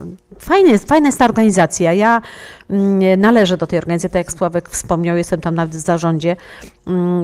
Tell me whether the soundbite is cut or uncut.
uncut